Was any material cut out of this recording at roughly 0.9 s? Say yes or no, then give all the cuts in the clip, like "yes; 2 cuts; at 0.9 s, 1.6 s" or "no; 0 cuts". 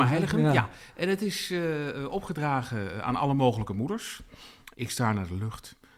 no; 1 cut; at 4.7 s